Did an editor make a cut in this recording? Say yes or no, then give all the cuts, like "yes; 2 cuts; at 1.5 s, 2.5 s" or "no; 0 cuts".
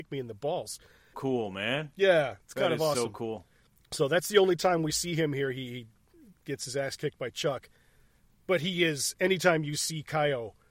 yes; 1 cut; at 1.1 s